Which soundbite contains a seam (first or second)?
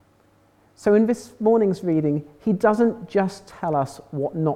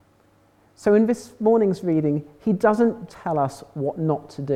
second